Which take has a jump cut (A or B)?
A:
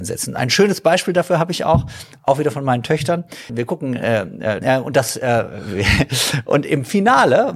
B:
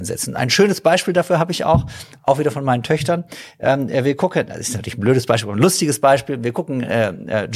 A